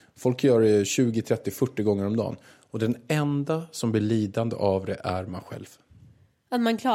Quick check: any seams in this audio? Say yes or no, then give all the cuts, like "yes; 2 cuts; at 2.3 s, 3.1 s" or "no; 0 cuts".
no; 0 cuts